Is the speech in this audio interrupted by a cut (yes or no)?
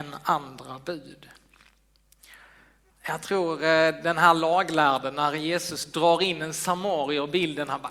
yes